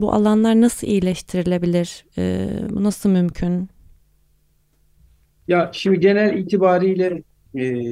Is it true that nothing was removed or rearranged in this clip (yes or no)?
yes